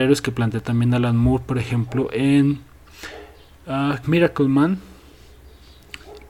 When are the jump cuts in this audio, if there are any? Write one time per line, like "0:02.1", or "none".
0:04.0